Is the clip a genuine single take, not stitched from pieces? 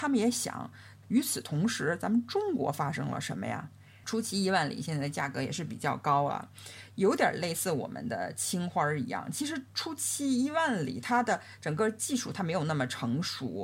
no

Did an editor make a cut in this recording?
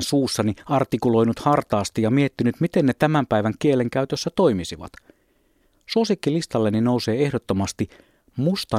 no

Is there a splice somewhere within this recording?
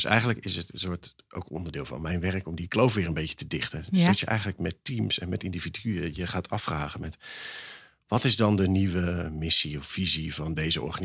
no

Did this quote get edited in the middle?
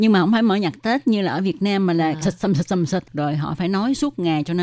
yes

